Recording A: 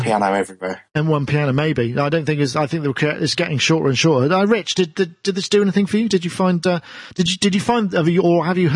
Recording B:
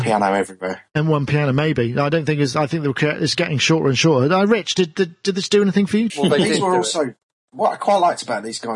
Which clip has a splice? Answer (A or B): B